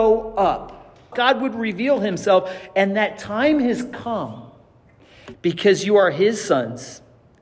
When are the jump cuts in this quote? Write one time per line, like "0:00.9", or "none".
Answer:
0:01.1
0:05.3

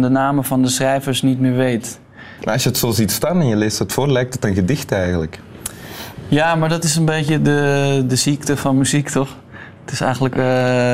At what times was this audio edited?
0:02.4

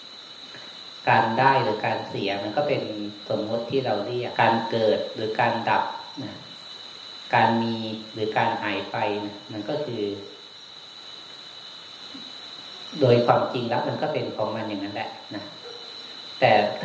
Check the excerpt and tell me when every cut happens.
0:04.3

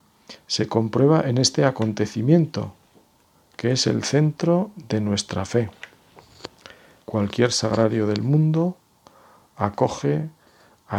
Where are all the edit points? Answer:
0:07.0

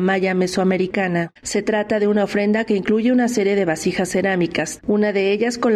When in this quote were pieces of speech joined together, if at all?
0:01.4
0:04.8

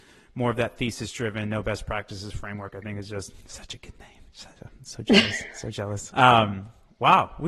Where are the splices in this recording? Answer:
0:06.1

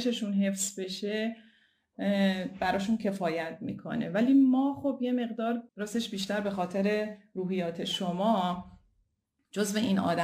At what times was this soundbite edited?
0:05.7

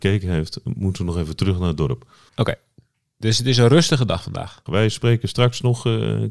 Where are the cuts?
0:02.3
0:04.7

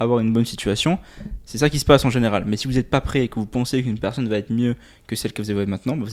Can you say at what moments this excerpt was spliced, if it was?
none

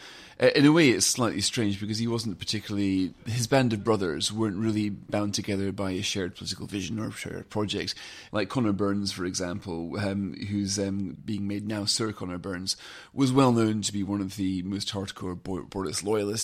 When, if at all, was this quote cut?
0:08.3

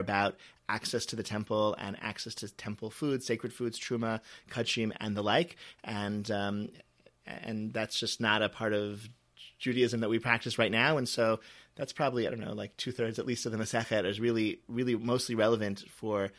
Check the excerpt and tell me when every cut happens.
none

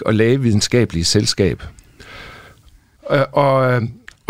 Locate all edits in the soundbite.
0:03.0

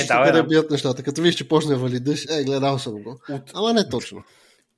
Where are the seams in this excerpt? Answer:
0:02.2

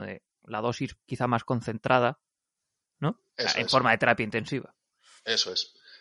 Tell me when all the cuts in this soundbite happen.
0:03.3

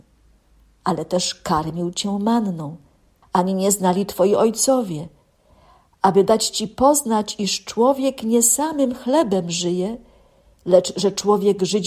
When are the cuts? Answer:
0:03.2

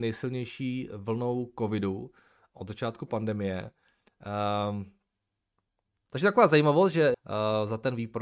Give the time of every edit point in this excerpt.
0:06.1
0:07.1

